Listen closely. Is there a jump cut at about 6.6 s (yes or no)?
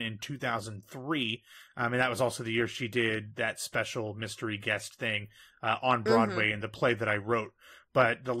no